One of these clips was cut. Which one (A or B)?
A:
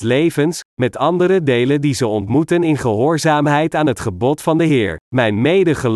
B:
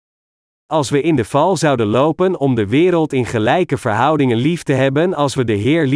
A